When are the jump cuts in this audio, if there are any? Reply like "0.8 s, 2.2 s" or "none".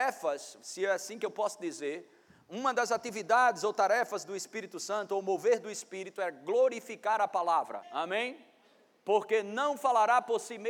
7.8 s